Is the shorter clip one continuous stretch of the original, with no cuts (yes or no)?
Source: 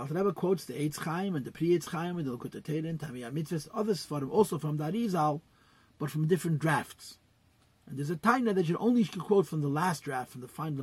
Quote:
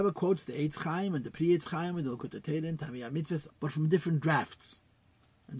no